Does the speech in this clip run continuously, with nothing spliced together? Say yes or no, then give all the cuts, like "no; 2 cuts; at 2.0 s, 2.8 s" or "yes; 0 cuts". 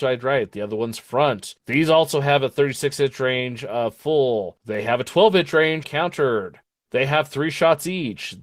no; 1 cut; at 5.8 s